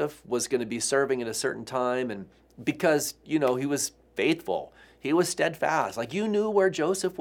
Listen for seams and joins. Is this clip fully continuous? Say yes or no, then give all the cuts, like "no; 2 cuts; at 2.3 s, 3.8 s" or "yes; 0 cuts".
yes; 0 cuts